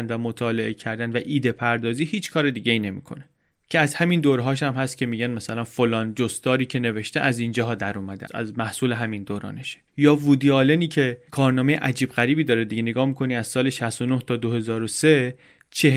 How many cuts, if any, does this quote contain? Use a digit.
2